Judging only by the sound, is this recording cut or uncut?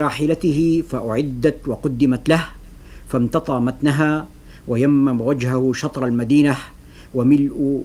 uncut